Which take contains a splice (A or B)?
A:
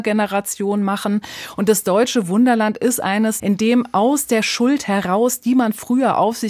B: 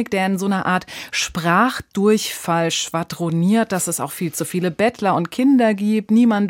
A